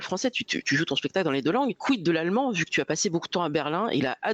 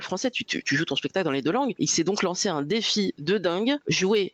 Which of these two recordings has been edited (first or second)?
second